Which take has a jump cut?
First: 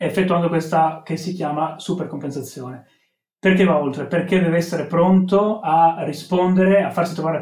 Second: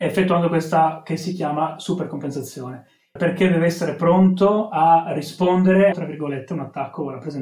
second; 2 cuts; at 3.2 s, 5.9 s

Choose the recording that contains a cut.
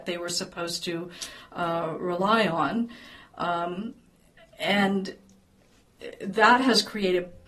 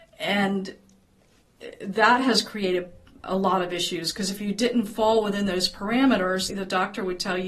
second; 1 cut; at 6.5 s

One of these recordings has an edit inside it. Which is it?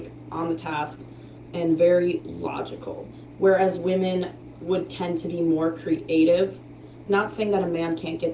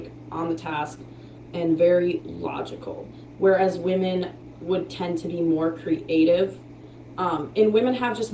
first; 1 cut; at 7.1 s

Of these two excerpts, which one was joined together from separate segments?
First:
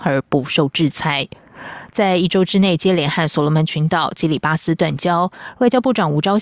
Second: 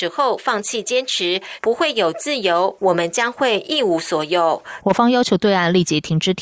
second; 3 cuts; at 1.6 s, 2.8 s, 4.8 s

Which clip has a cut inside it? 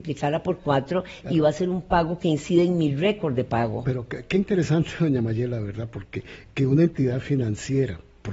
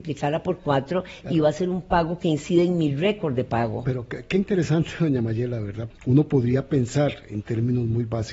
second; 1 cut; at 5.9 s

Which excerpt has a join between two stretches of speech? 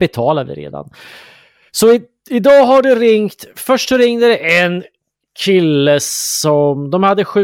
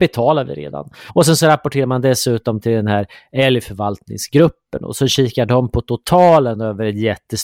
second; 1 cut; at 1.1 s

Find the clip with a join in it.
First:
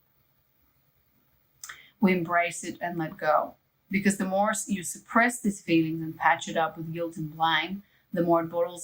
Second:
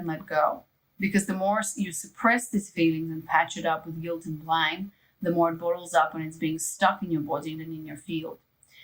second; 1 cut; at 7.6 s

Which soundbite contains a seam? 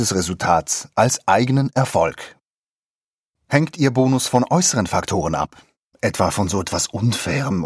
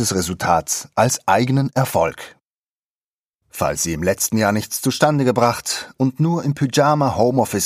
second; 1 cut; at 3.3 s

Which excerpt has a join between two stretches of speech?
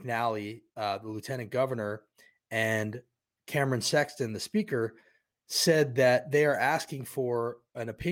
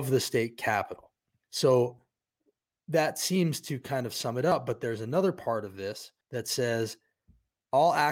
second; 2 cuts; at 1.4 s, 6.2 s

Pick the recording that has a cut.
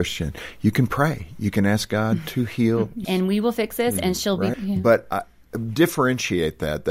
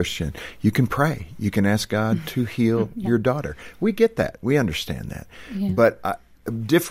first; 2 cuts; at 3.0 s, 4.5 s

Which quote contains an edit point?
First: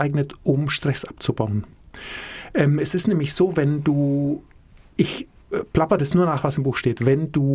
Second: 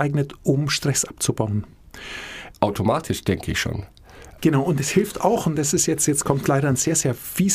second; 2 cuts; at 2.5 s, 4.4 s

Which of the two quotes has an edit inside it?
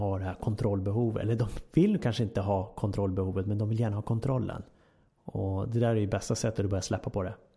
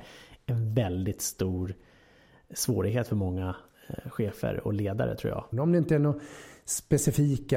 second; 1 cut; at 5.5 s

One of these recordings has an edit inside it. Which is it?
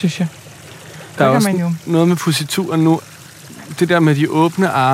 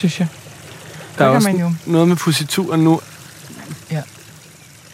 second; 1 cut; at 3.8 s

